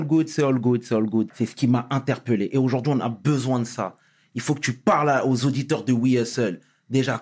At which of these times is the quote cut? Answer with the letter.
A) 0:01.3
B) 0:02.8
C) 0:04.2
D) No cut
A